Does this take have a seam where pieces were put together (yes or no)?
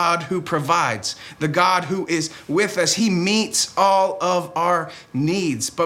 no